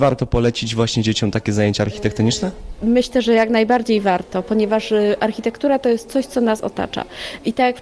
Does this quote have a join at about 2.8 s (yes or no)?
no